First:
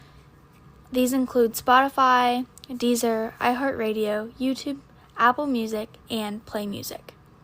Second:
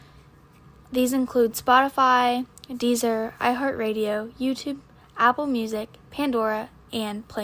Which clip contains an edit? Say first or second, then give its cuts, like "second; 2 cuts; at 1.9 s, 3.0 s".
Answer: first; 1 cut; at 6.0 s